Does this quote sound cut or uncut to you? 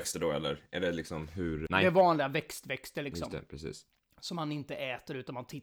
cut